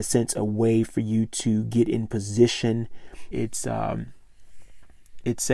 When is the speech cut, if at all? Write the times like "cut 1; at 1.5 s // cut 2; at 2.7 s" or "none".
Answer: cut 1; at 3.3 s